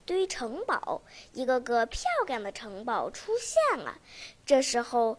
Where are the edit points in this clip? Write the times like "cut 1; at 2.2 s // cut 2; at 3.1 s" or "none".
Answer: none